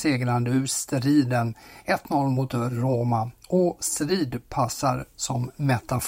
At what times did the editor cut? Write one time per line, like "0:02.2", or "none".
0:05.1